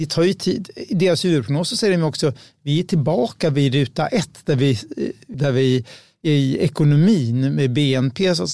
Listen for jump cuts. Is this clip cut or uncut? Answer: cut